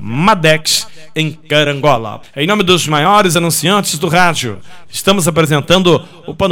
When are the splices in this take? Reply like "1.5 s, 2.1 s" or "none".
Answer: 2.2 s